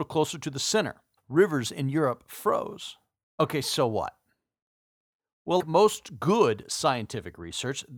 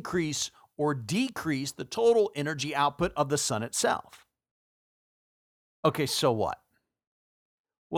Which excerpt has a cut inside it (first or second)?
first